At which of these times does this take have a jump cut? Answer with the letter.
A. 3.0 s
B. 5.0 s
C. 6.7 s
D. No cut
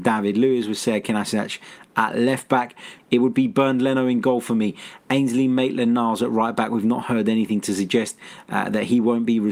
A